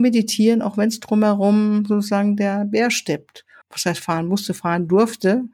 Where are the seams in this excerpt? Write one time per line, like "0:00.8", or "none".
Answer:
0:03.6